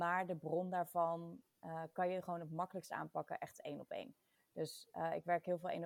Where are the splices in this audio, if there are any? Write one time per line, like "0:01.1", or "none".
none